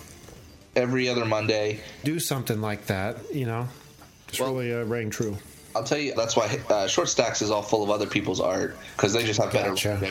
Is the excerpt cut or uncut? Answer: cut